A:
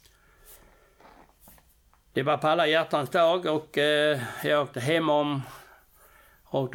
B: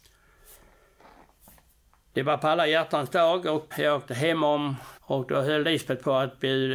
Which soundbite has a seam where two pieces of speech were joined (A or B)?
B